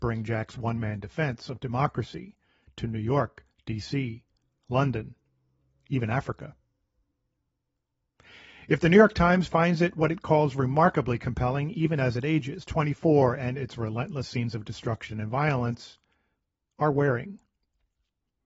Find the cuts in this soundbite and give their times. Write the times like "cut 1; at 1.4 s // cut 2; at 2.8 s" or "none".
none